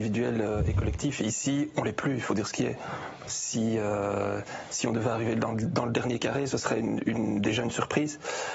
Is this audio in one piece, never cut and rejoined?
yes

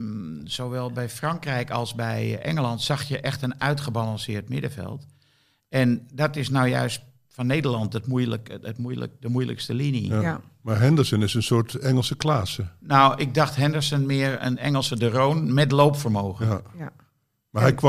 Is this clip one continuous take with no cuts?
yes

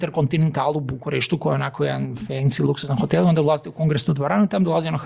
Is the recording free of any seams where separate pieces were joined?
yes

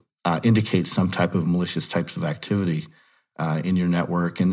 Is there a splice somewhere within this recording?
no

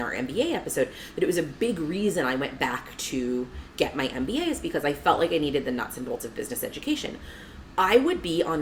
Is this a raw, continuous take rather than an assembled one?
yes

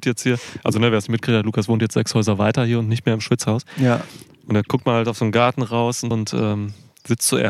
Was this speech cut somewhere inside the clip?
yes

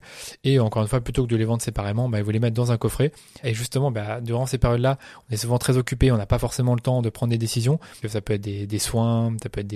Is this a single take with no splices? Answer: no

